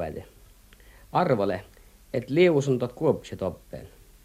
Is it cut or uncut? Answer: uncut